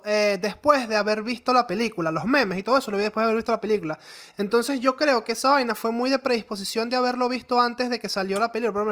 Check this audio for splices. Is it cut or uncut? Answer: uncut